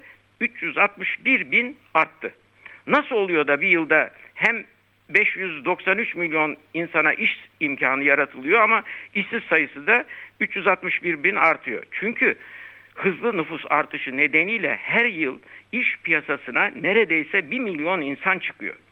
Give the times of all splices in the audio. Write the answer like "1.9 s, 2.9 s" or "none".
none